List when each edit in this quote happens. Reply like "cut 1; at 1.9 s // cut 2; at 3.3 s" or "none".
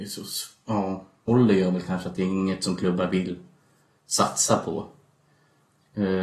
cut 1; at 1.3 s